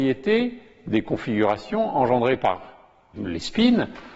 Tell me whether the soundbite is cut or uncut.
cut